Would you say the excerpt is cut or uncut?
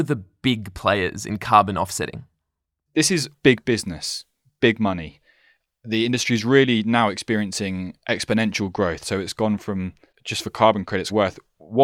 uncut